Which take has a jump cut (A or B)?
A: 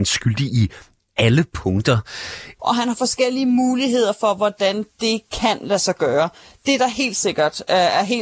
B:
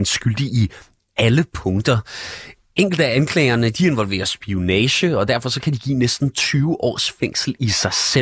A